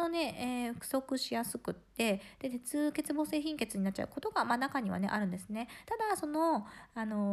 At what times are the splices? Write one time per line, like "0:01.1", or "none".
0:05.9